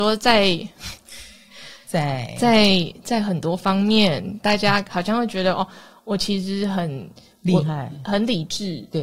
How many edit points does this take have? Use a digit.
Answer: 0